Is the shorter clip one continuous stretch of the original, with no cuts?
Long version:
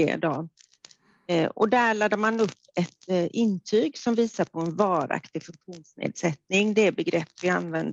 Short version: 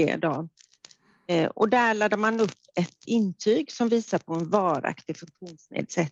no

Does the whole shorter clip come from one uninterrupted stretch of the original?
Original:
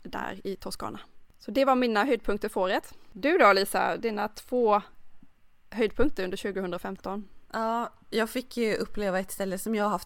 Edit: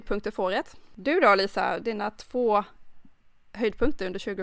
yes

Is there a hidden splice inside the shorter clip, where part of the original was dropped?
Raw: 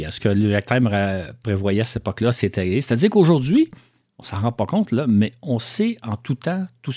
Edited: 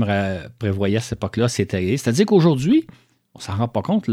no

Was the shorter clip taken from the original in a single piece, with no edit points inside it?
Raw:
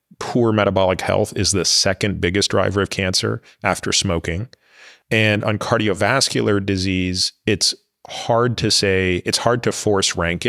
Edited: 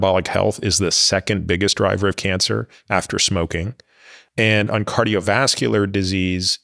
yes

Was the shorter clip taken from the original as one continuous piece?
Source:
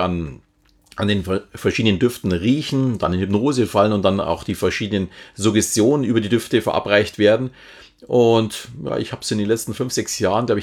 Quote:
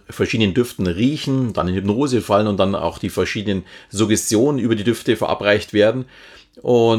yes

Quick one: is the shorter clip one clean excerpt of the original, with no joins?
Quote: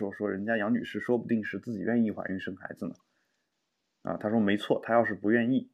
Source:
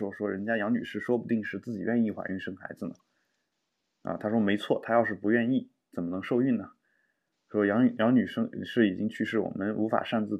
yes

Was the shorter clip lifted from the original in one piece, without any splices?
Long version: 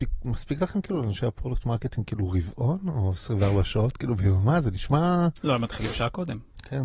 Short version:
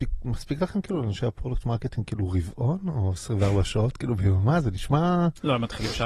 yes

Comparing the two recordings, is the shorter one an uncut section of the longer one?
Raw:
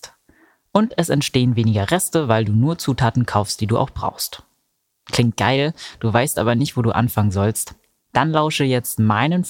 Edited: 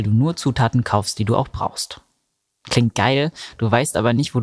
yes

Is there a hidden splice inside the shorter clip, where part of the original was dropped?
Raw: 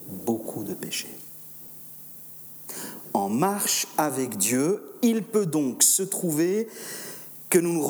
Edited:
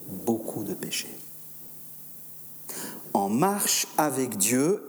no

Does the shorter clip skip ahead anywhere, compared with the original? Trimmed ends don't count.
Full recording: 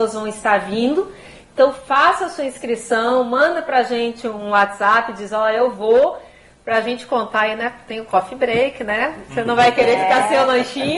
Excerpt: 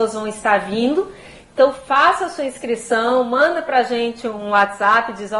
no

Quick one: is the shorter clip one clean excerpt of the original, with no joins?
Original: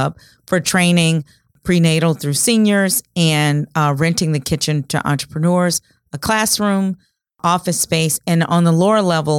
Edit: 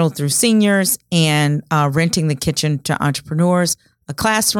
yes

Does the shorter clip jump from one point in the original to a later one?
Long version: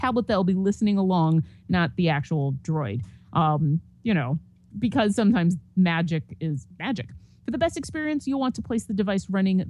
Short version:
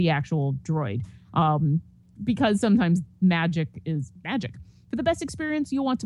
yes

